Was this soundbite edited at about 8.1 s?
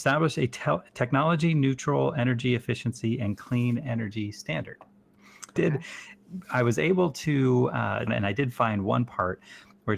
yes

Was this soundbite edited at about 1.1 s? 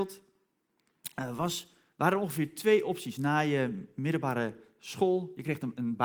no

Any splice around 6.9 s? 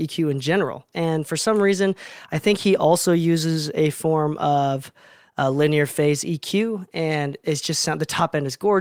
no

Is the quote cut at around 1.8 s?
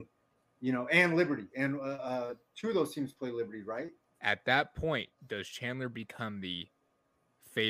no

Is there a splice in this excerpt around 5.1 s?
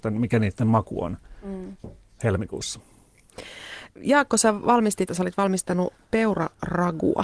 yes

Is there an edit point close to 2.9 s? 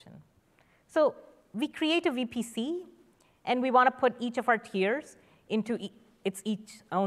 no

